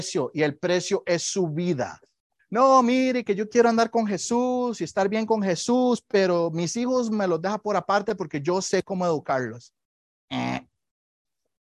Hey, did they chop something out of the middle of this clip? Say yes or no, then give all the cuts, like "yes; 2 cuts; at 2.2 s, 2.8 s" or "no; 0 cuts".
yes; 1 cut; at 2.4 s